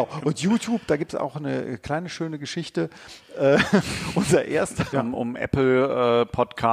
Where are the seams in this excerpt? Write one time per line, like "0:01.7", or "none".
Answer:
0:04.9